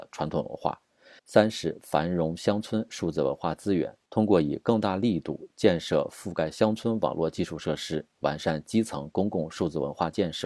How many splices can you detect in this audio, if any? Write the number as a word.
one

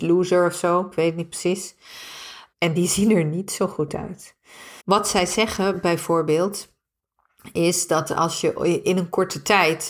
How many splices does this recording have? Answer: two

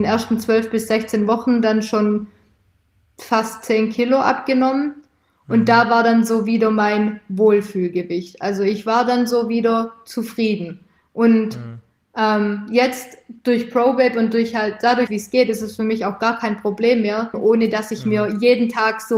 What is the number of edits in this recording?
two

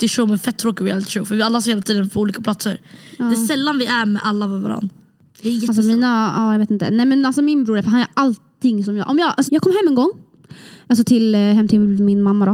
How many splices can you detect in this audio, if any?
one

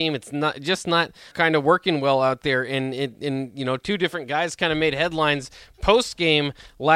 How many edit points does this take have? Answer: one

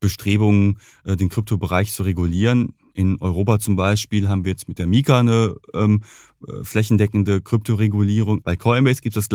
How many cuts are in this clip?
one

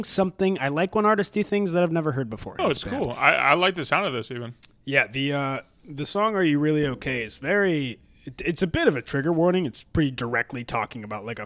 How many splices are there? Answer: one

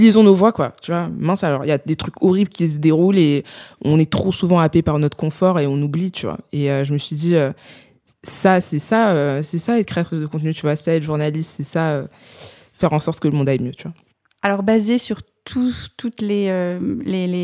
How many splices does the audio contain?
zero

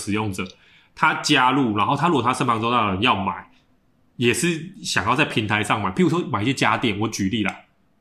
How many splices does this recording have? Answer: zero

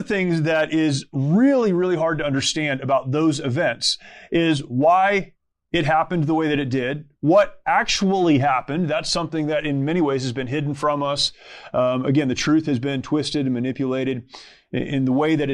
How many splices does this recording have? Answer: zero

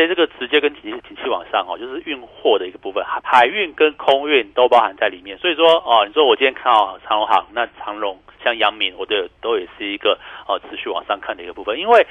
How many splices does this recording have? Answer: one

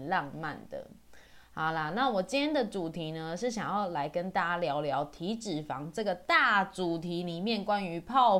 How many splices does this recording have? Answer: zero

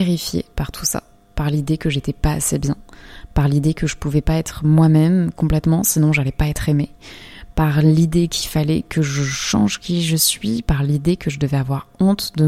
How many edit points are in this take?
zero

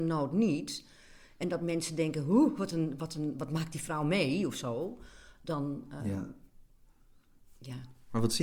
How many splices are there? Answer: zero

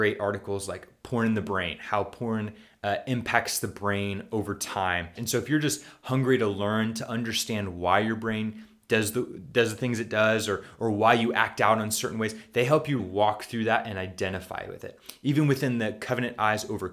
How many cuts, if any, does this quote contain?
two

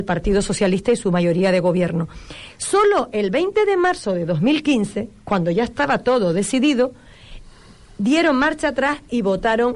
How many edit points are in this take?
zero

